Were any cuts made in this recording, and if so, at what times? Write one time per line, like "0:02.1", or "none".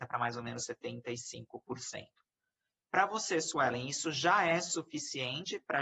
none